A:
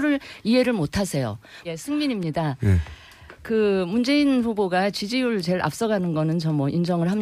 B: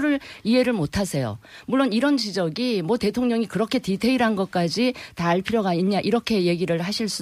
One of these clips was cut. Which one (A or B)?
A